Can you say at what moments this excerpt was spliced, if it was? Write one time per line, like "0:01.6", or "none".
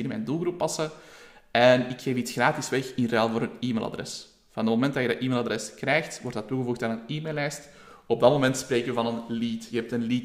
none